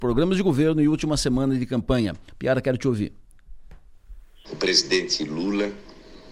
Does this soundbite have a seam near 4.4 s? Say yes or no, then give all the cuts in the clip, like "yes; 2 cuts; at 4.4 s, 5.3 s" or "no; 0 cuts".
yes; 1 cut; at 4.4 s